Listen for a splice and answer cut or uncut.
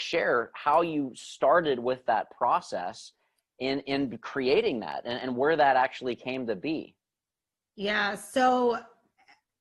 uncut